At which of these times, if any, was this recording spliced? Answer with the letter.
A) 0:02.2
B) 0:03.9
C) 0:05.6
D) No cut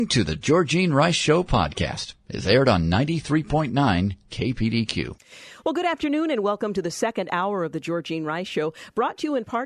D